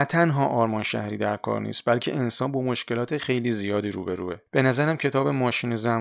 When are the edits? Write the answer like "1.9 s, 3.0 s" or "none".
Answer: 3.2 s, 4.5 s